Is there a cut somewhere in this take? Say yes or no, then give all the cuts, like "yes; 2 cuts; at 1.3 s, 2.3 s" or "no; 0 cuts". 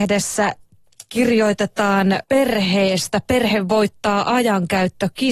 yes; 1 cut; at 2.2 s